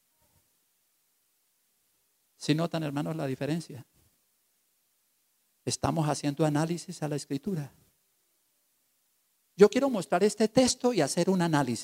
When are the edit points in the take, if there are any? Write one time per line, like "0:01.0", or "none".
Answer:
none